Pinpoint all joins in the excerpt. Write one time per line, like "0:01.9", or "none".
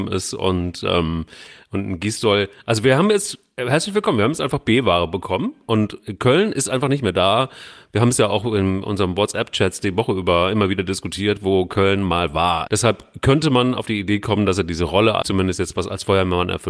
0:12.7
0:15.2